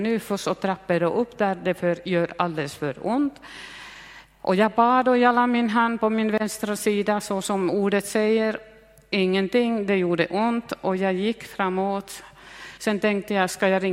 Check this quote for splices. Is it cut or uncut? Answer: cut